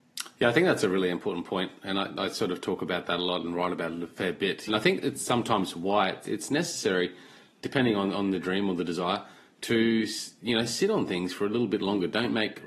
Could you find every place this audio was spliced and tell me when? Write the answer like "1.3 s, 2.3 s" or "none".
4.7 s